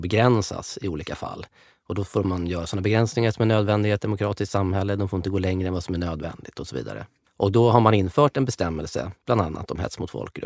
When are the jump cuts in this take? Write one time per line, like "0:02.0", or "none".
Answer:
none